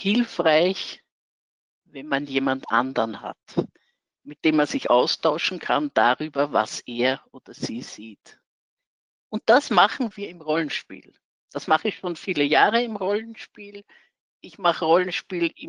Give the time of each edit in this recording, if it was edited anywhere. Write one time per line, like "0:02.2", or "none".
0:09.1